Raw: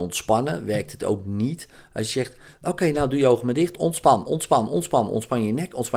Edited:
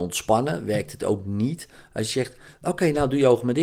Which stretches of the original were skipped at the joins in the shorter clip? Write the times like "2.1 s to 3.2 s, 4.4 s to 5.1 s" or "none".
none